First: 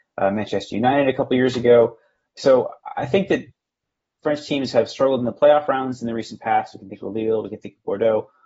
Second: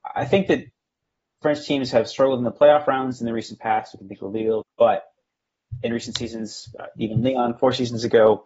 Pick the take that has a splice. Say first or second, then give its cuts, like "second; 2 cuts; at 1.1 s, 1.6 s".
second; 1 cut; at 4.6 s